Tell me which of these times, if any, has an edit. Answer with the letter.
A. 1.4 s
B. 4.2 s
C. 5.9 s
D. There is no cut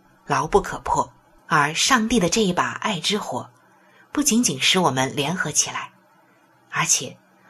A